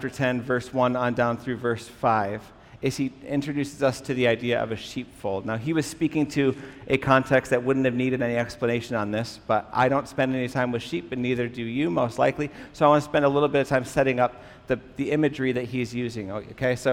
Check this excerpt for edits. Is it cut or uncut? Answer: uncut